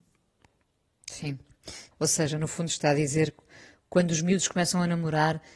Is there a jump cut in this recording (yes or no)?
yes